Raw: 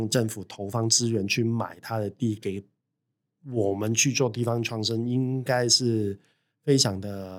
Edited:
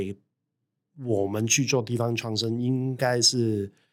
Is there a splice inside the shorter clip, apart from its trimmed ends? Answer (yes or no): no